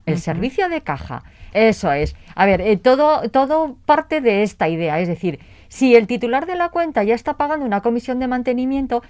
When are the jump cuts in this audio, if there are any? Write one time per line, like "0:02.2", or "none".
0:01.5